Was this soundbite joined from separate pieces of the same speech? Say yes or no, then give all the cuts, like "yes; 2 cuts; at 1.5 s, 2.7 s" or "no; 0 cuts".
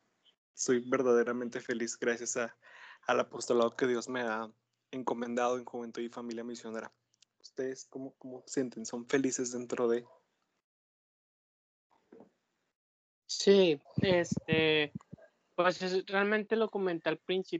no; 0 cuts